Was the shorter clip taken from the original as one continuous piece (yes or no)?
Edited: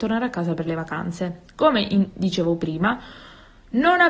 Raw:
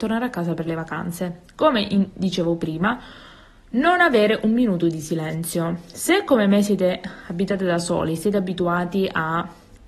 yes